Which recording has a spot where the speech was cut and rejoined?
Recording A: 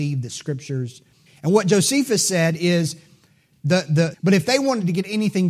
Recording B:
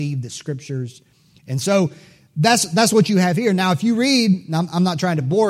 A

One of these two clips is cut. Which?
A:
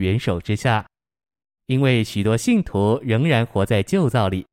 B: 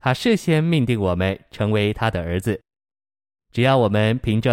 B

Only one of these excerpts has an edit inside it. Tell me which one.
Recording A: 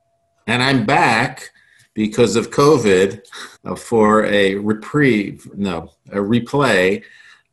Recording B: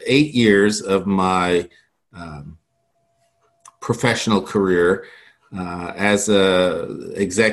A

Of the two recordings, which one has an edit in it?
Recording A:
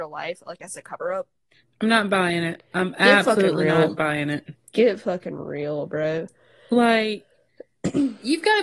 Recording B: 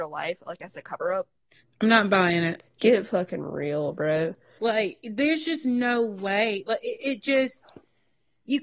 B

